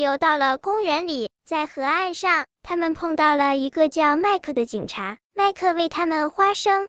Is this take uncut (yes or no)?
yes